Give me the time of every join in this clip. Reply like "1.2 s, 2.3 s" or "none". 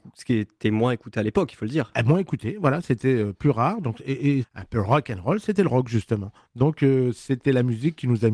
4.4 s